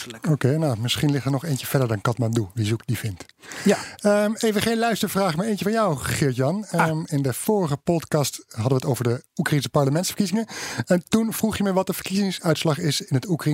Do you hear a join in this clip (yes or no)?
no